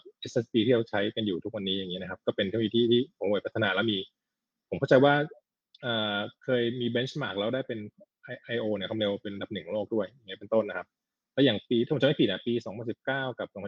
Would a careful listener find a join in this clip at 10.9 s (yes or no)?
no